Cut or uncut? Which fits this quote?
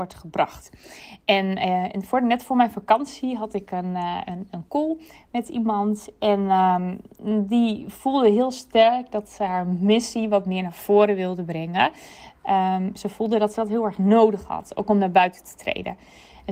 uncut